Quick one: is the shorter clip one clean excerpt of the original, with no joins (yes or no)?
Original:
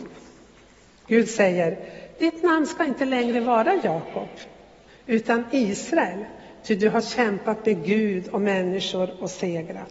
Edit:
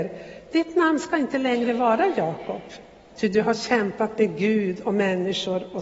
no